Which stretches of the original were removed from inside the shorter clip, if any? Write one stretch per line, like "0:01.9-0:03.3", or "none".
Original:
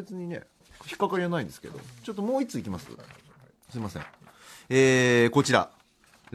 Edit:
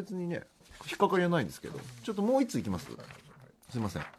none